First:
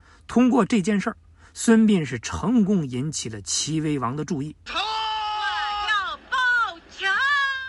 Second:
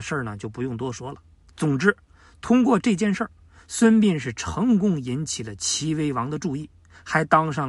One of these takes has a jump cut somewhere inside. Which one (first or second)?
first